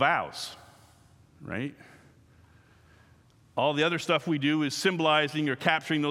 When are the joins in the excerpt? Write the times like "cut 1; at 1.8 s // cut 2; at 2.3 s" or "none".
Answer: none